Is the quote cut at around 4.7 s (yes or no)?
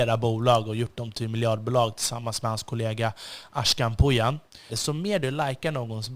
yes